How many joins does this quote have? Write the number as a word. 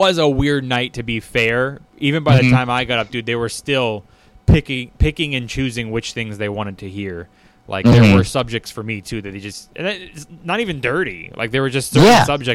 zero